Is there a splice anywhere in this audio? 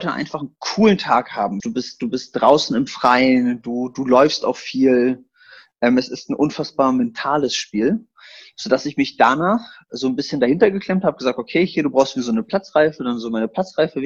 yes; 1 cut; at 1.6 s

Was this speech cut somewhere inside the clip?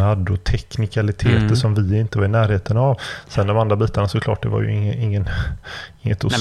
no; 0 cuts

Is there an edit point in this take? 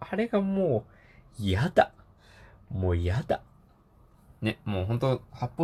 no; 0 cuts

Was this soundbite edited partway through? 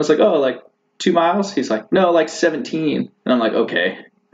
yes; 1 cut; at 3.2 s

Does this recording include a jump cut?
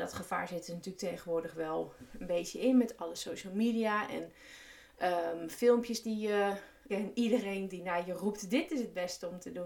yes; 1 cut; at 6.9 s

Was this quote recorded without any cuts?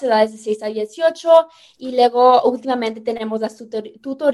yes; 0 cuts

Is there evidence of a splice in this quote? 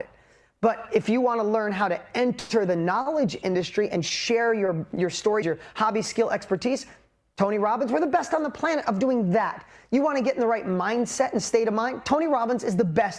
yes; 1 cut; at 5.4 s

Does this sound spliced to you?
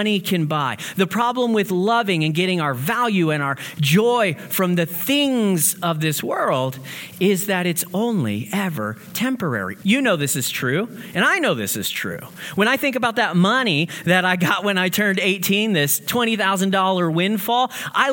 yes; 1 cut; at 9.8 s

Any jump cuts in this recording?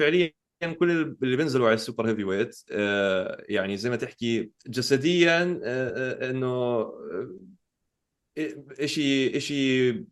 yes; 1 cut; at 4.6 s

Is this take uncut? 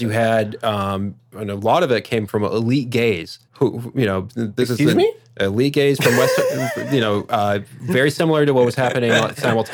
no; 1 cut; at 3.5 s

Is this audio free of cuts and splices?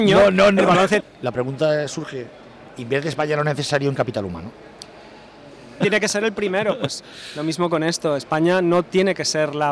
no; 2 cuts; at 1.0 s, 5.8 s

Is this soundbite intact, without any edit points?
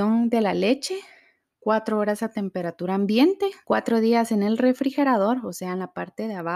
no; 1 cut; at 3.6 s

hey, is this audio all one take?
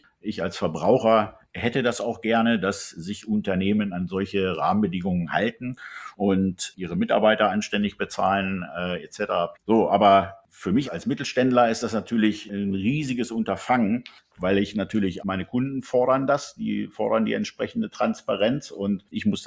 no; 3 cuts; at 9.5 s, 10.9 s, 15.2 s

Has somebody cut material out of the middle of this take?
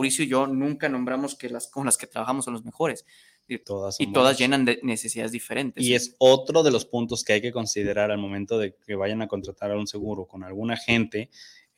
yes; 1 cut; at 3.6 s

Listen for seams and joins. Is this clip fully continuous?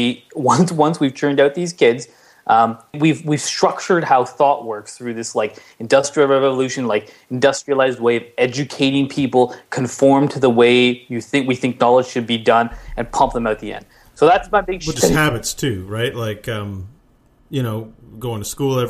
no; 2 cuts; at 2.9 s, 15.0 s

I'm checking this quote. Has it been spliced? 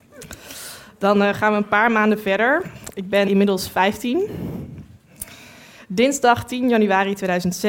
no; 0 cuts

